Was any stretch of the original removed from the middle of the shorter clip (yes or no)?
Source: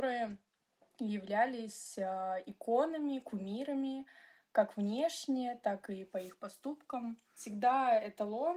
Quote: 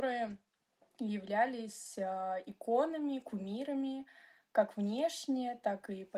no